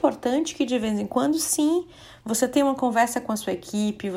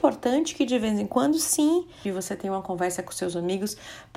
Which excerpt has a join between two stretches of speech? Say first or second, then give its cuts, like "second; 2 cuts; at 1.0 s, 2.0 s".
second; 1 cut; at 2.0 s